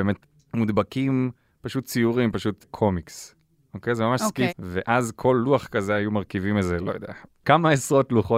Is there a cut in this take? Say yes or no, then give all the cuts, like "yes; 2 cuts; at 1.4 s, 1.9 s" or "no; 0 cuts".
yes; 1 cut; at 4.5 s